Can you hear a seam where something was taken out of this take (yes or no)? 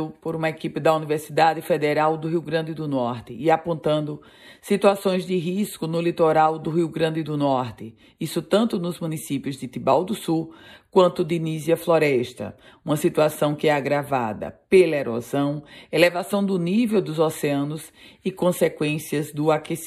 no